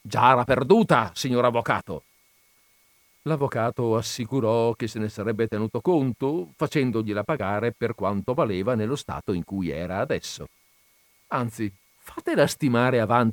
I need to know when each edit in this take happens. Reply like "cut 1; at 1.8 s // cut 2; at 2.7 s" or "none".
cut 1; at 11.9 s